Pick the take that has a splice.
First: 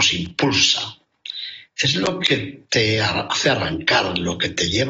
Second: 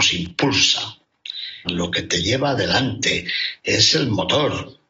second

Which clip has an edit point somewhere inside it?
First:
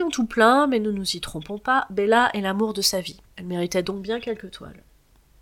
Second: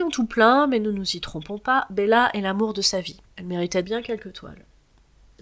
second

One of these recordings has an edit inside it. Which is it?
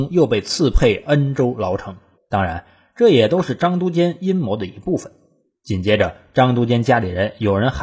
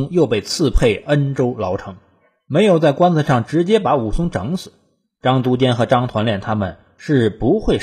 first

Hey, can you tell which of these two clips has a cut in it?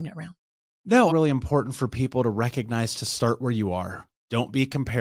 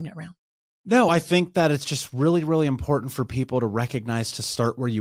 first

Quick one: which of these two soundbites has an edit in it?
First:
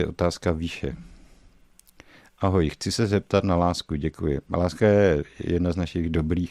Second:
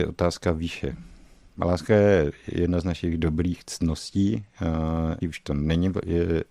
second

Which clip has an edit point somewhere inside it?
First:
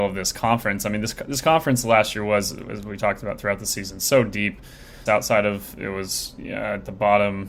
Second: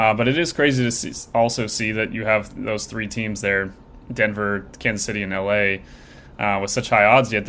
first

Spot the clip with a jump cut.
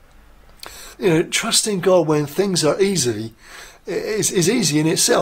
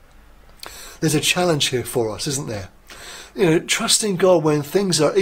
first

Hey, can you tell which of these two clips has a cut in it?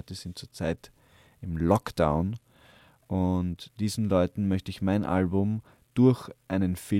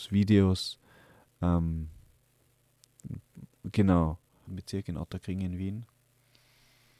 second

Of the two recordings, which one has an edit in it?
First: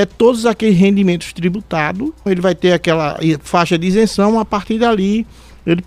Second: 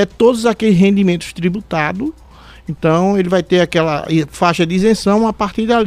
first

